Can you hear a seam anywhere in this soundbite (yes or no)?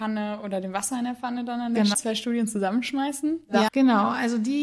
yes